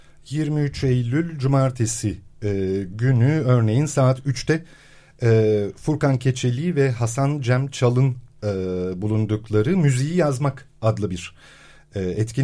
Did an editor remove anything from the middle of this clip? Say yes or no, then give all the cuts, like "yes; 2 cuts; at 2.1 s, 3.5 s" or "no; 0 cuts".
no; 0 cuts